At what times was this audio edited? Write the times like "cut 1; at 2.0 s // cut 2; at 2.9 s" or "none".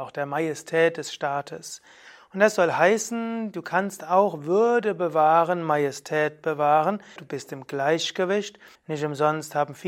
cut 1; at 7.2 s // cut 2; at 8.8 s

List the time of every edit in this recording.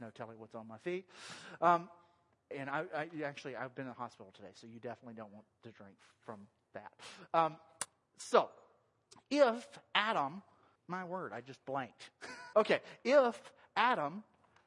cut 1; at 10.8 s // cut 2; at 12.5 s

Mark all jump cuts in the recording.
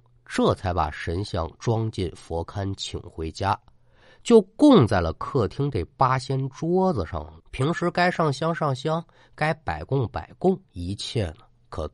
cut 1; at 7.4 s // cut 2; at 10.7 s

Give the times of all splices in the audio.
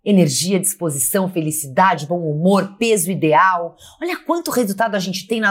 none

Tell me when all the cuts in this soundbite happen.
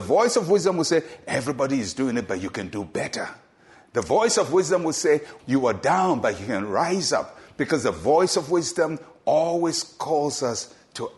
cut 1; at 5.4 s

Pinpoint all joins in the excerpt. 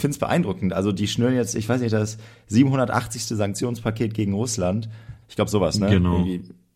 cut 1; at 5.2 s

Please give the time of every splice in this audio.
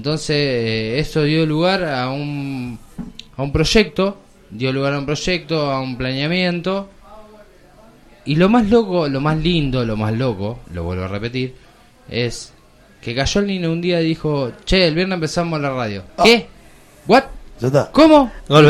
cut 1; at 10.6 s // cut 2; at 16.1 s

